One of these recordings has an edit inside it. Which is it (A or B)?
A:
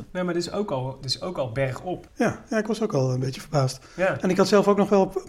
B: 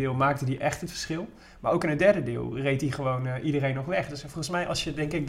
A